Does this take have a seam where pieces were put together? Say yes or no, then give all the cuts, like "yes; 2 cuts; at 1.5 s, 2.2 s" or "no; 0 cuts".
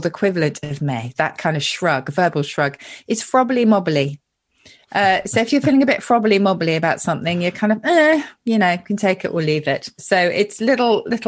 no; 0 cuts